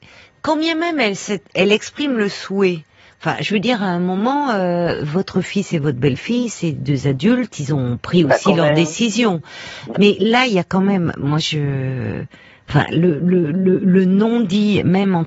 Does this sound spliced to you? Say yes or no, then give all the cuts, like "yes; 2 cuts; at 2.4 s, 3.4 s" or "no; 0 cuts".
yes; 1 cut; at 9.9 s